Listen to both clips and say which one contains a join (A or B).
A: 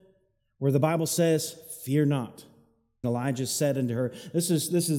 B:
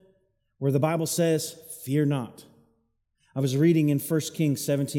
A